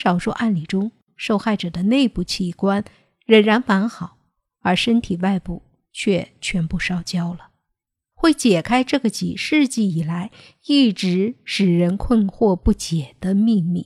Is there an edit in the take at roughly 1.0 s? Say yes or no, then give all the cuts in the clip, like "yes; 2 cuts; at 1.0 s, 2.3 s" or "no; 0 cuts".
no; 1 cut; at 8.1 s